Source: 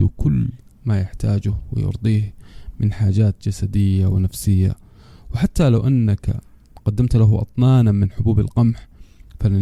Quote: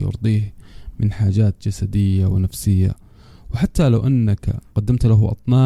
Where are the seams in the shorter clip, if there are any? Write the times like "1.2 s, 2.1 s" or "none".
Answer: 4.7 s